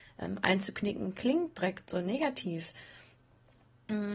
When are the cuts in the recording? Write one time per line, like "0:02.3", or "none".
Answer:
none